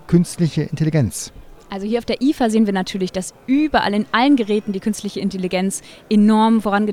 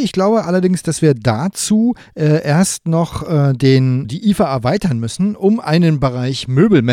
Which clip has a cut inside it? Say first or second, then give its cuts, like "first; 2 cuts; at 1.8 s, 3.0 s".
second; 1 cut; at 4.0 s